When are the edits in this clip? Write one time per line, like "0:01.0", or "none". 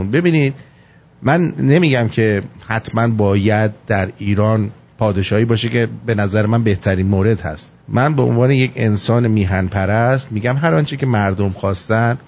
0:07.8